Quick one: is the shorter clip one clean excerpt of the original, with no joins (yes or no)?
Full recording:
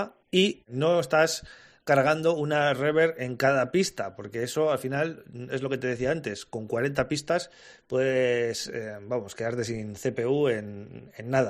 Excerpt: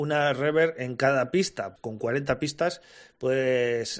no